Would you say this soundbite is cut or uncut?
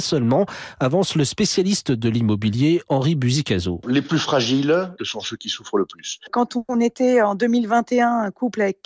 cut